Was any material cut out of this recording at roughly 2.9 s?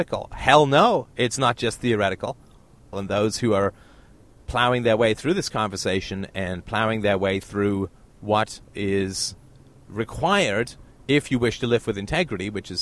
yes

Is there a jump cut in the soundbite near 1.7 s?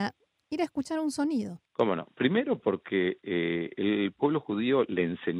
yes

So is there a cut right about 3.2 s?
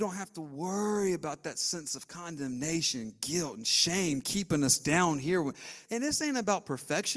no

